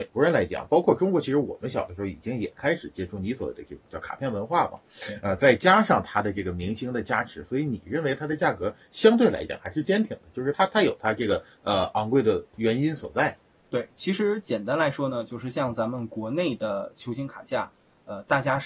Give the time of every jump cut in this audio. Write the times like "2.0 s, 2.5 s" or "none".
none